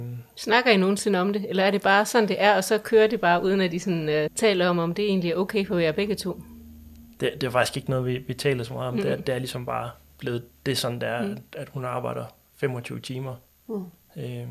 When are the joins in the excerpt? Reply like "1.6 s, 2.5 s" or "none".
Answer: 4.3 s